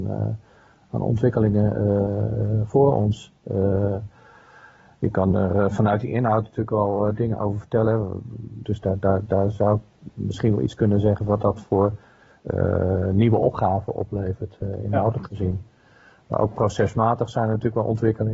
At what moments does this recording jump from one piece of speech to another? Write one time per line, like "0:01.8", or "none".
0:08.6